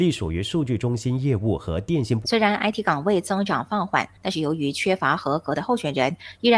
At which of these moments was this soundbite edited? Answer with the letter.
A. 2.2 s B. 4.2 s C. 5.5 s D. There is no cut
A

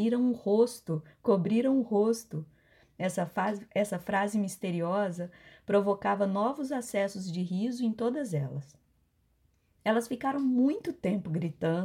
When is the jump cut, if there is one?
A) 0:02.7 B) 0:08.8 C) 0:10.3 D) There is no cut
D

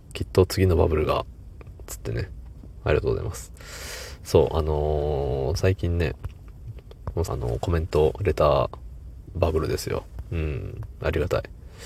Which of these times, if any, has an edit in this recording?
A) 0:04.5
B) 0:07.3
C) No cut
B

